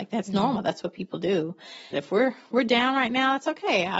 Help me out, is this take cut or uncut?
cut